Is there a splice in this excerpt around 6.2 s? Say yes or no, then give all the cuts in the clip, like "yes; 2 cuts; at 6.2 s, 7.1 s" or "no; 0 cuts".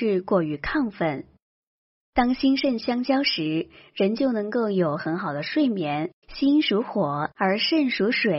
yes; 2 cuts; at 6.2 s, 7.3 s